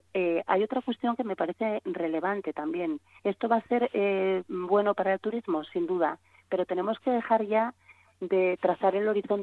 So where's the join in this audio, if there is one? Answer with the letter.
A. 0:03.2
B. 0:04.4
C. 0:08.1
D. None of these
A